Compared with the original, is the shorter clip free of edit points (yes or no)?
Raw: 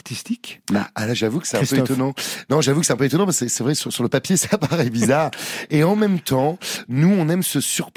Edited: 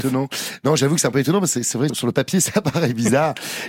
no